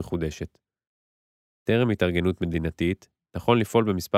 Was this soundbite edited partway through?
yes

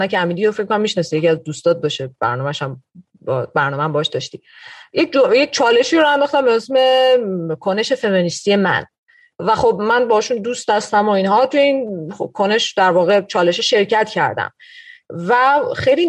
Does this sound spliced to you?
no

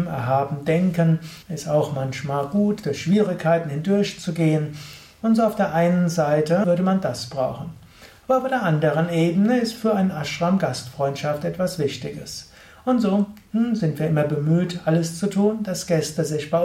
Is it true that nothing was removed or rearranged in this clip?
no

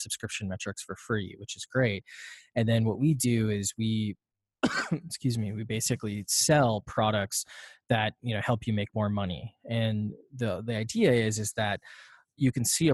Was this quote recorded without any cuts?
yes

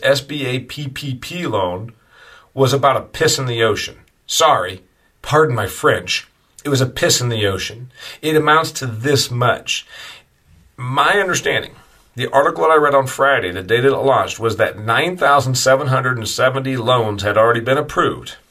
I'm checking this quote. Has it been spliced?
no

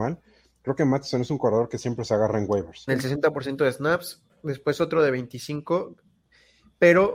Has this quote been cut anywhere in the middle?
yes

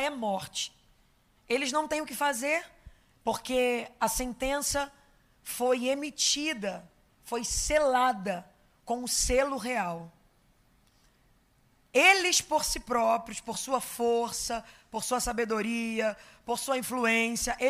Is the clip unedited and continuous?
yes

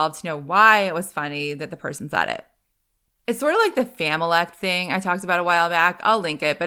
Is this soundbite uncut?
yes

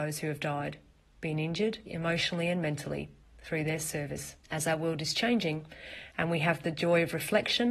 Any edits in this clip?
yes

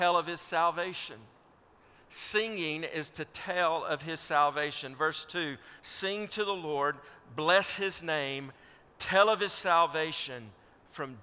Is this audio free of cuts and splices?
yes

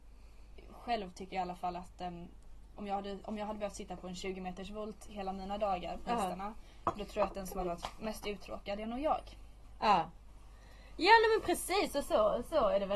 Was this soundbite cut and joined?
no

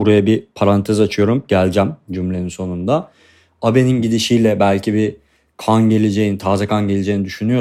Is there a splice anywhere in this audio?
no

